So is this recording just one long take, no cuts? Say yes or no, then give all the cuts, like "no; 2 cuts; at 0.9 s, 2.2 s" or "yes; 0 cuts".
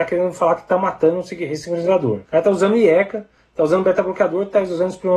no; 1 cut; at 2.2 s